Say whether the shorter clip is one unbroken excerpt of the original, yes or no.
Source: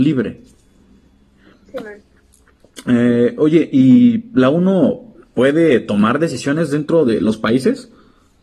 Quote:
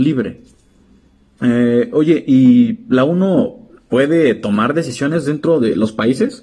no